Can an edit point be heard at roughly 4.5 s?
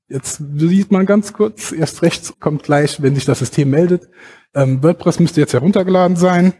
no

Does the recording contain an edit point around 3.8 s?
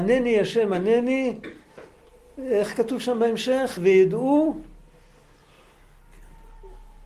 no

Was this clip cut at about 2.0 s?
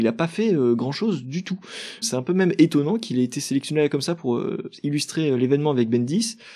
yes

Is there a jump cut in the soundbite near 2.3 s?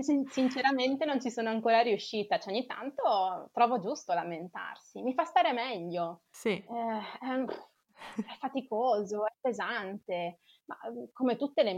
no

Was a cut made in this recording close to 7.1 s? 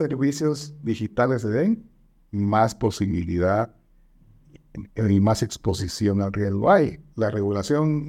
yes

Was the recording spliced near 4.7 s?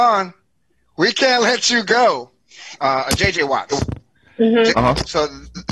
yes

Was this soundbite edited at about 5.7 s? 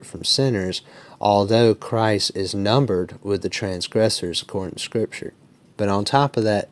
yes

